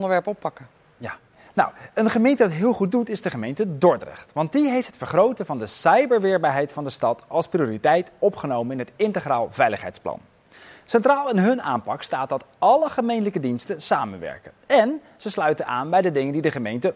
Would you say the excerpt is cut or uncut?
uncut